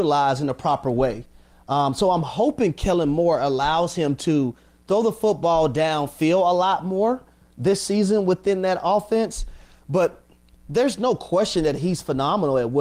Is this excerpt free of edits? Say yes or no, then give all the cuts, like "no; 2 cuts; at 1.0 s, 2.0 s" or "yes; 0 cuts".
yes; 0 cuts